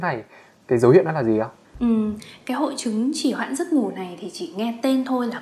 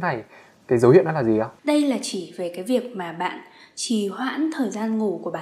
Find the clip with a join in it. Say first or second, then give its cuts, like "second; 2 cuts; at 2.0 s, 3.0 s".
second; 1 cut; at 1.6 s